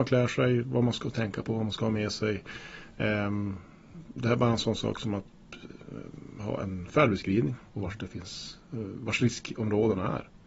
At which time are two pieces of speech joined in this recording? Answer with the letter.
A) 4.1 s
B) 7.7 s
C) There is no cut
B